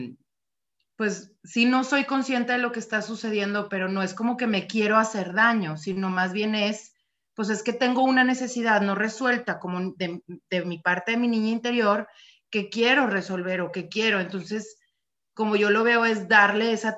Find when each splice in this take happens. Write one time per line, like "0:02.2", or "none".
none